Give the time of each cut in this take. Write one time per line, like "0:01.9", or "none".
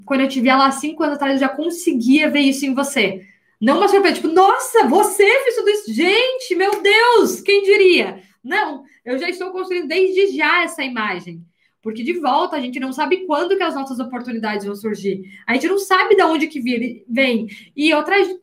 none